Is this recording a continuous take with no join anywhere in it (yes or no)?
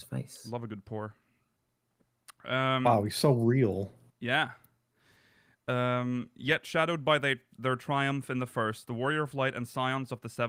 yes